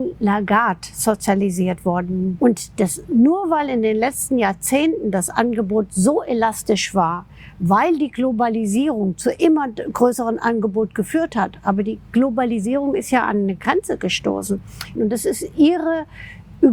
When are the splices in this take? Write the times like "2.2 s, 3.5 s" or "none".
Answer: 2.4 s, 15.0 s